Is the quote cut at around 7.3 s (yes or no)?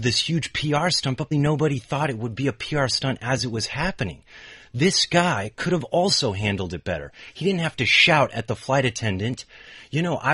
no